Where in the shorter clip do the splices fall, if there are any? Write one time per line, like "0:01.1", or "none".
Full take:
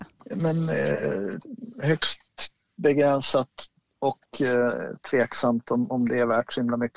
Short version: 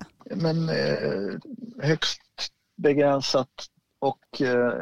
none